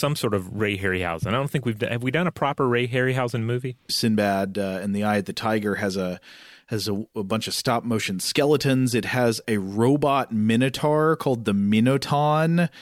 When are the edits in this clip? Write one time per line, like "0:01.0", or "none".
0:03.9
0:09.4